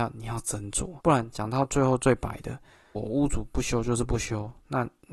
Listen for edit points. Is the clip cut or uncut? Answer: cut